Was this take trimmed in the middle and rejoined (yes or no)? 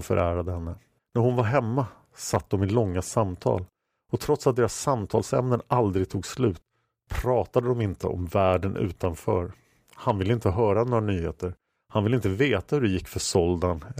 yes